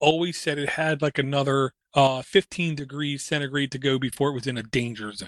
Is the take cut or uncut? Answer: uncut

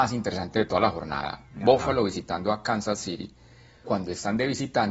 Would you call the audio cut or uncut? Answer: cut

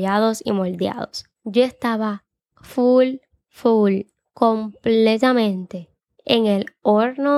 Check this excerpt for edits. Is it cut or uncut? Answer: cut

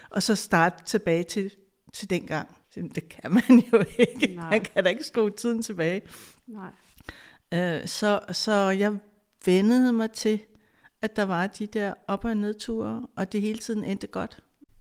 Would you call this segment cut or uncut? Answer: cut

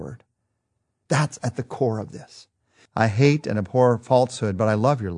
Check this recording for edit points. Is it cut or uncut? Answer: cut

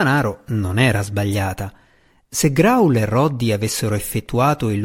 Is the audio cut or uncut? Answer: uncut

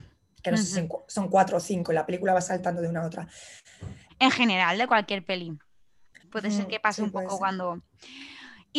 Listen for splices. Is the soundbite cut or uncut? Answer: cut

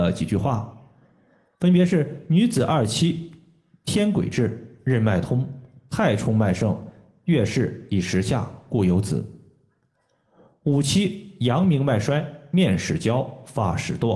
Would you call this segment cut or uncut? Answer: uncut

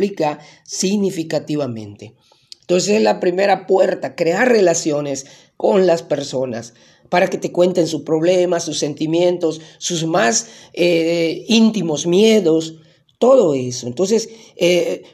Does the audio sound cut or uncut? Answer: uncut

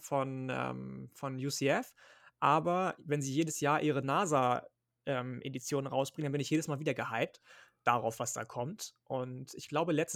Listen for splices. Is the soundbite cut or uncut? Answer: uncut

